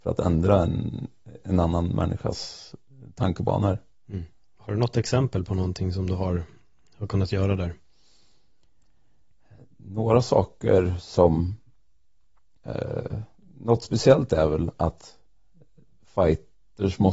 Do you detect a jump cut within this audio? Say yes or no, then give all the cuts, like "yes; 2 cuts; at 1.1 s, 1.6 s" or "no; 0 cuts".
no; 0 cuts